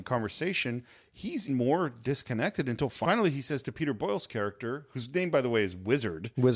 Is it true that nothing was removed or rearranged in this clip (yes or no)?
no